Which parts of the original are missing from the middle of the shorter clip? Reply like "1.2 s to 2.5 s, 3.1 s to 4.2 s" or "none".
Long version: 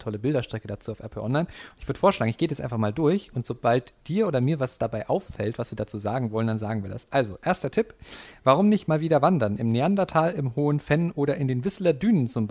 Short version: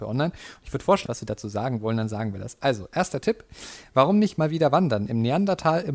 2.2 s to 5.6 s